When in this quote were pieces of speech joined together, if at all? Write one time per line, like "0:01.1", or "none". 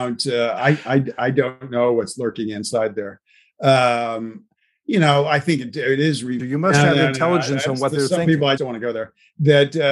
0:06.4
0:08.6